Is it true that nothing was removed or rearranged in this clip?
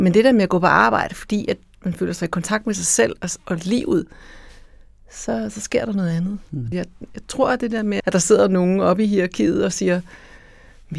no; 2 cuts; at 6.7 s, 8.0 s

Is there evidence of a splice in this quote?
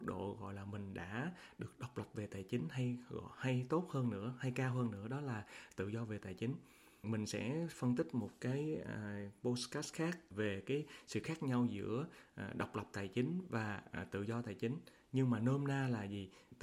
no; 0 cuts

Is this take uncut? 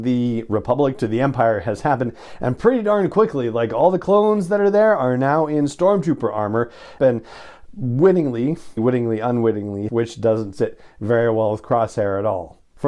no; 3 cuts; at 7.0 s, 8.8 s, 9.9 s

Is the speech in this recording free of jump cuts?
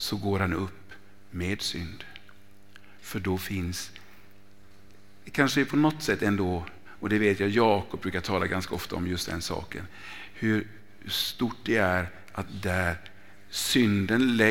yes; 0 cuts

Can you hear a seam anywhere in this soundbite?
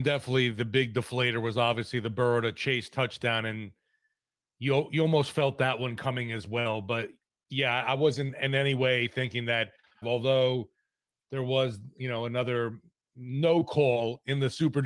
yes; 1 cut; at 10.0 s

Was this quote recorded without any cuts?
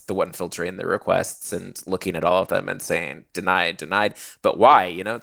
no; 1 cut; at 3.8 s

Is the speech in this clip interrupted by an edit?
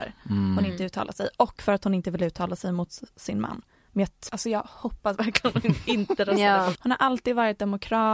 yes; 2 cuts; at 4.3 s, 6.8 s

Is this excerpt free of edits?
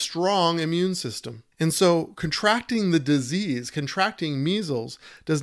no; 1 cut; at 1.5 s

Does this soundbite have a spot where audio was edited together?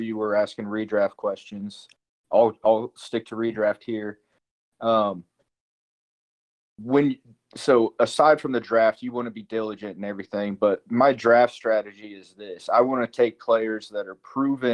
no; 0 cuts

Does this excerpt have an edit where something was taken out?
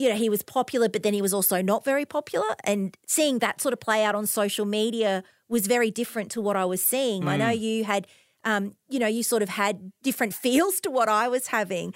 yes; 1 cut; at 7.2 s

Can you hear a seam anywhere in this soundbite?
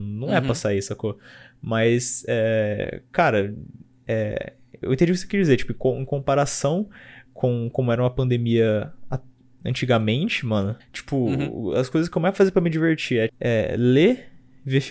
yes; 2 cuts; at 10.8 s, 13.3 s

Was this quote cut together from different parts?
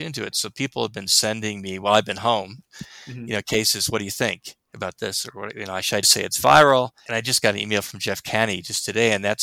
yes; 1 cut; at 6.0 s

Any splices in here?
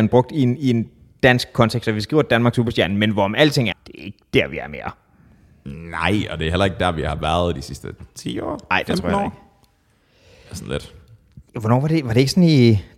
yes; 2 cuts; at 3.7 s, 11.5 s

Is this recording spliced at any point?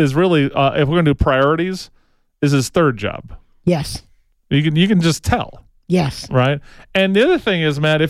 no; 0 cuts

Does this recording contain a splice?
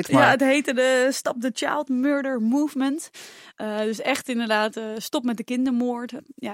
no; 0 cuts

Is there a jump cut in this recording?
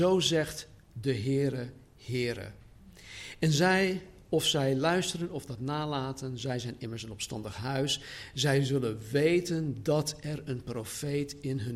no; 0 cuts

